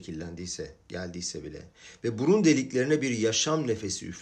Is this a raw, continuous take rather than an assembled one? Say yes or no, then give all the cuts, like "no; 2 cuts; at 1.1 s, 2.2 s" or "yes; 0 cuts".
yes; 0 cuts